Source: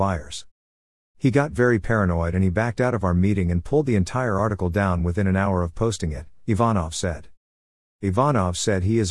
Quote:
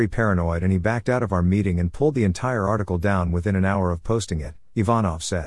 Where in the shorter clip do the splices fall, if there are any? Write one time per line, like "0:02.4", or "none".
none